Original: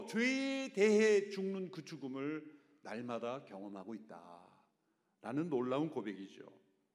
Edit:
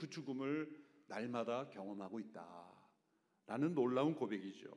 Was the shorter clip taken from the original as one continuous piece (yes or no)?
yes